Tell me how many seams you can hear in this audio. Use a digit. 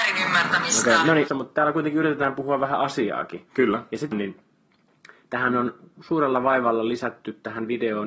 2